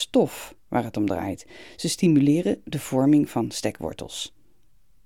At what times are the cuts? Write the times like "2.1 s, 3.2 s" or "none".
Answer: none

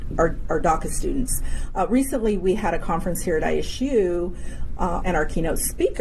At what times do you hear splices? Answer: 5.0 s

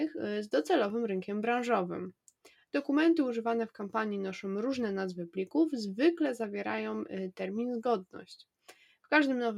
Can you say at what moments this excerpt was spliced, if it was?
2.5 s

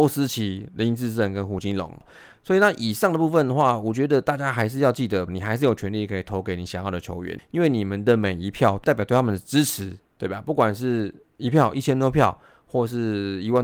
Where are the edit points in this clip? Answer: 5.3 s, 7.4 s

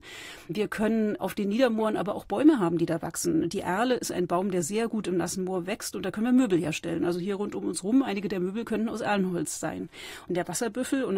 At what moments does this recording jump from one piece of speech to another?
10.3 s

